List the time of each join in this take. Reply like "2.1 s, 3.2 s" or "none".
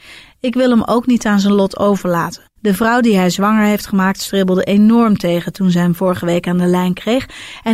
2.6 s